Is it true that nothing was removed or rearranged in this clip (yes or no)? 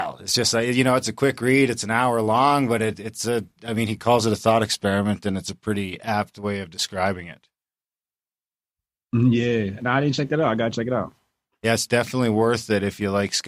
yes